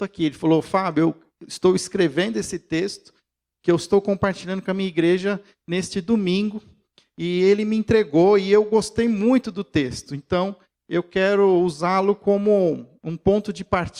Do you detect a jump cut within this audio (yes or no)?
no